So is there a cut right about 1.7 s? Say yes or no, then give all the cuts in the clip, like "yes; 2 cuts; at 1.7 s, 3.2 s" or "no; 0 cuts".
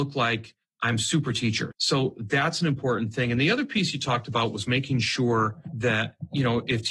yes; 1 cut; at 1.7 s